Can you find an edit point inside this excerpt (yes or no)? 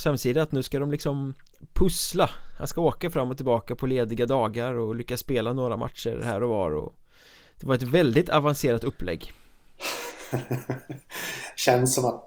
no